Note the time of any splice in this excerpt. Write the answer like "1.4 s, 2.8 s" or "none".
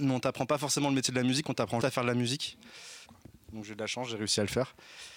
1.8 s, 3.1 s

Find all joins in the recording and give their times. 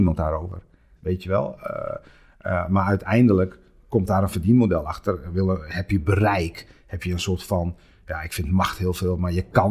1.0 s

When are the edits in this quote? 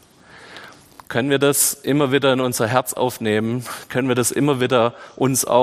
none

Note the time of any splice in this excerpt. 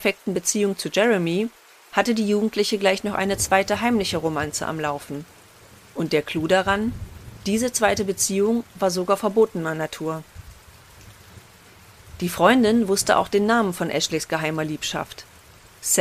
none

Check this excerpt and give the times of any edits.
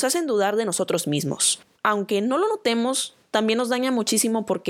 1.8 s

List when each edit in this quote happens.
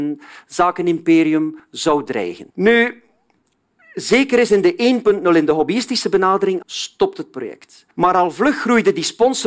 2.5 s, 6.6 s

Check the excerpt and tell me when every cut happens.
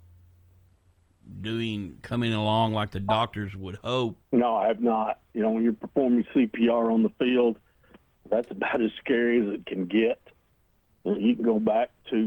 4.2 s

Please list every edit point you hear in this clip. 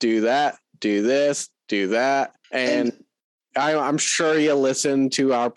2.4 s

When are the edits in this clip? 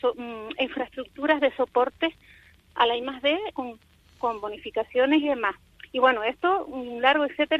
3.5 s

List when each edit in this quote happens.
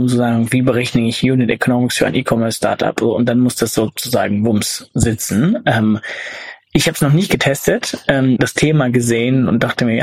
8.4 s

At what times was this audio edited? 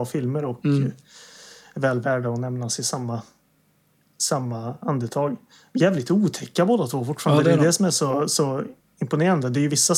none

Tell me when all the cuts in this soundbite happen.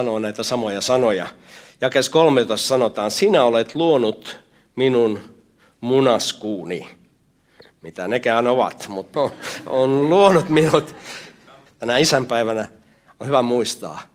9.1 s, 11.7 s

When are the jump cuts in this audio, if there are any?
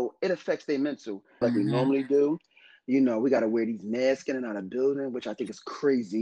1.4 s

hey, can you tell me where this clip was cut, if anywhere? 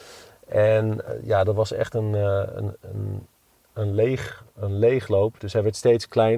none

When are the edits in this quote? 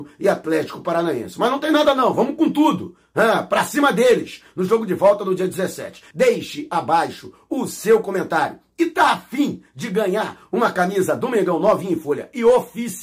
6.1 s

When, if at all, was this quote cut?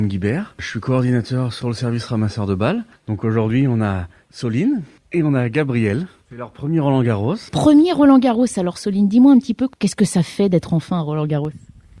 none

